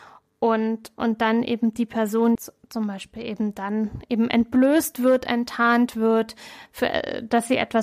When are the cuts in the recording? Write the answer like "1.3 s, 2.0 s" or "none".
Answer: 2.4 s